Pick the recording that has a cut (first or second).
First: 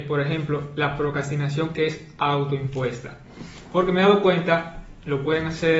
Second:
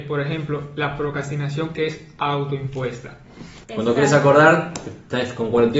second